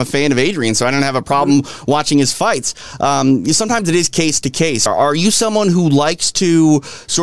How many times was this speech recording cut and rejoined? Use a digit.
0